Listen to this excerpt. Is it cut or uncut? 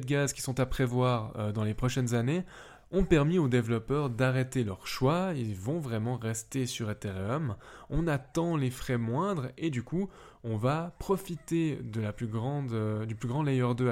uncut